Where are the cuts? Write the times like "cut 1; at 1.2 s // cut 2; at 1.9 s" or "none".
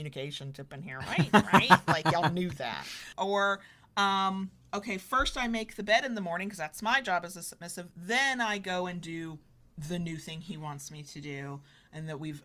cut 1; at 3.1 s